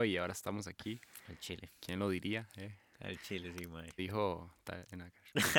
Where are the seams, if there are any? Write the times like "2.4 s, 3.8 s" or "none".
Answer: 4.0 s